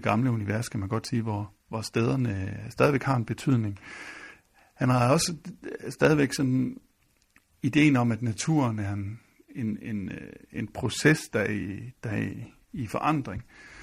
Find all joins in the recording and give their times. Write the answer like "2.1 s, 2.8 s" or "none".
none